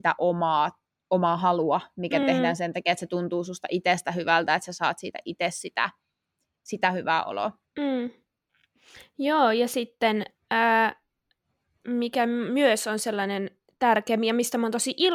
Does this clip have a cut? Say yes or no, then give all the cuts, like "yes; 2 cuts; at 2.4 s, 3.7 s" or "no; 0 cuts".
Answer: no; 0 cuts